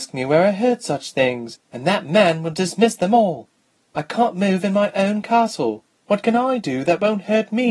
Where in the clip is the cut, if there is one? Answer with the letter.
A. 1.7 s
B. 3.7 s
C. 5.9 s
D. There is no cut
C